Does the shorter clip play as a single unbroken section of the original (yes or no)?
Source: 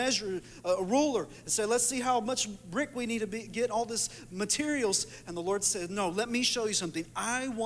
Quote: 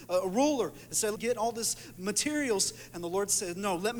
no